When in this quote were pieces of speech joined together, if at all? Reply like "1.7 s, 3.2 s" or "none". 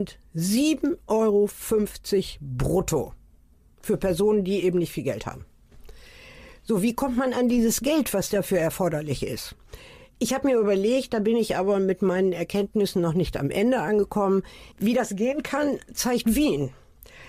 14.7 s